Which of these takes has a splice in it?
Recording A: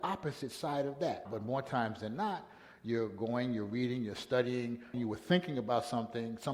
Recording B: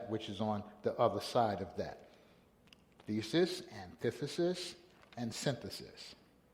A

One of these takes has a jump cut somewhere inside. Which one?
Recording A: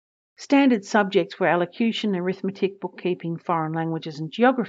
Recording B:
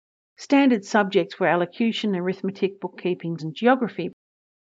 B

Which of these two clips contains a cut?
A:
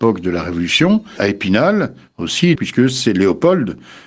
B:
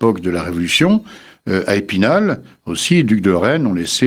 A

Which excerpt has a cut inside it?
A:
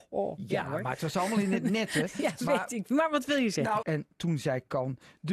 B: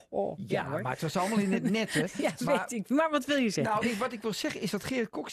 A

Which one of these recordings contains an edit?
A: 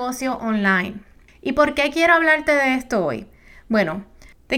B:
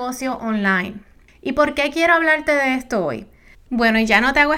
B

